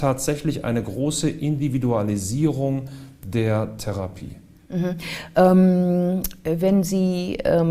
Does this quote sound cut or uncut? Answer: uncut